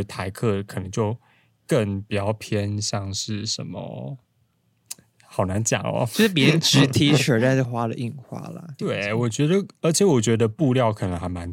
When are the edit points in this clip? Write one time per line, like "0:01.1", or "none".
0:07.6
0:08.8